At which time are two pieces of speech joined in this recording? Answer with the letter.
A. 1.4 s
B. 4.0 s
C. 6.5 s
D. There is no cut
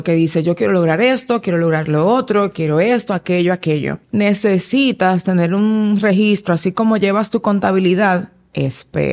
B